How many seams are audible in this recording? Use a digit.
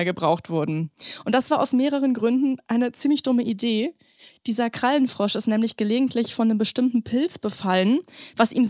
0